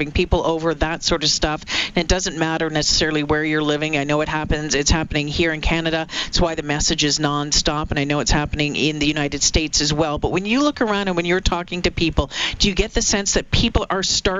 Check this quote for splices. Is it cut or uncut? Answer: uncut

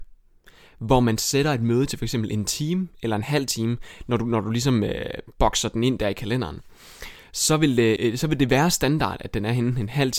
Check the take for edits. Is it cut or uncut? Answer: cut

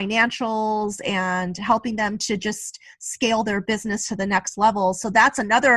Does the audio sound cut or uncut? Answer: uncut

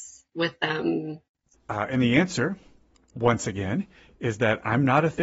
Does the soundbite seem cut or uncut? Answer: cut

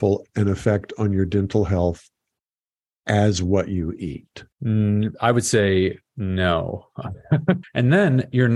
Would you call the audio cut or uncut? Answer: cut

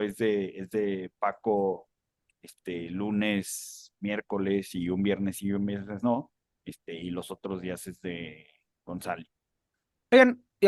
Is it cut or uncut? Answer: uncut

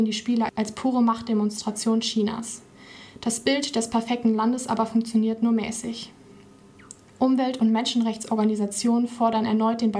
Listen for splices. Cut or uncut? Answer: uncut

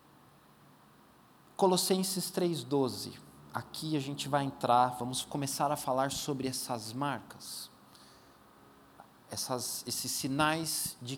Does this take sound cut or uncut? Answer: uncut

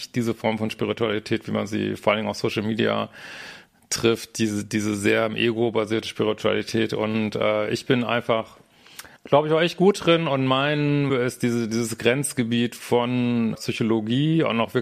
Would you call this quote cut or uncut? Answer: cut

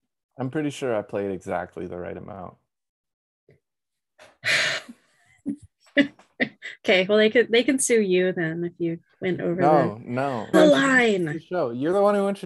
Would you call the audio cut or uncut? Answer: cut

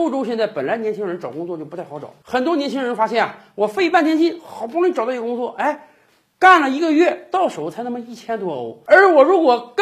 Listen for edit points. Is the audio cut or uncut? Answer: uncut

